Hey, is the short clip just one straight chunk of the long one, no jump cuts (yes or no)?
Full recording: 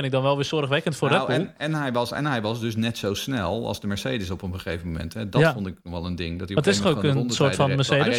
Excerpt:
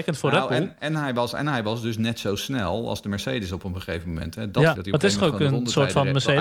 no